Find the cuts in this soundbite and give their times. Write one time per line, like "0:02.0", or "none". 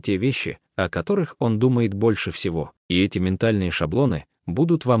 0:02.8